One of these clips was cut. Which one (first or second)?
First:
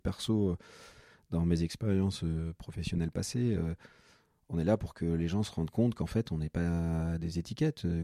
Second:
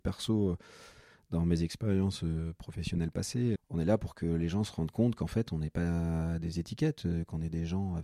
second